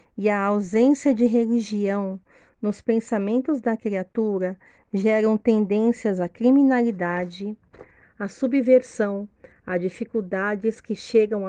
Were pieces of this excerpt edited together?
yes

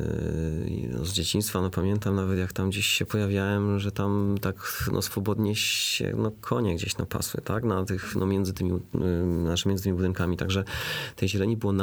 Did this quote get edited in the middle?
no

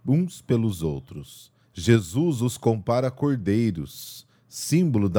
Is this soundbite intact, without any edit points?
no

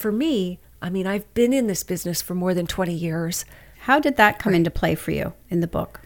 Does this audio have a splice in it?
yes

